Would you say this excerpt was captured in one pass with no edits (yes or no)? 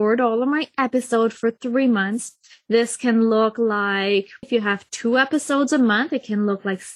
no